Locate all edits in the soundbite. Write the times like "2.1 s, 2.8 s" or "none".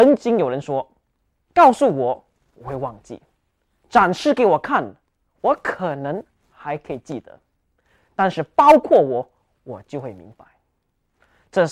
none